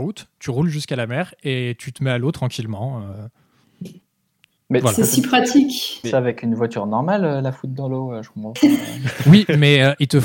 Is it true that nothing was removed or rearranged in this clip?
no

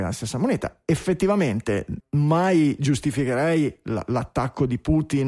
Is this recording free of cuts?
no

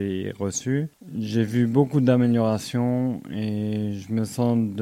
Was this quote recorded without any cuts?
yes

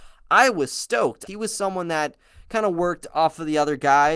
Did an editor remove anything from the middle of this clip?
yes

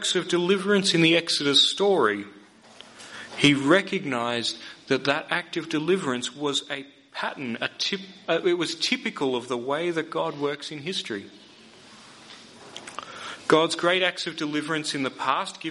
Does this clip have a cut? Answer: no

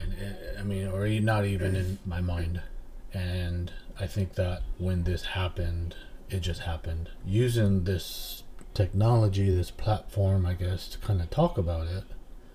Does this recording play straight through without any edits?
yes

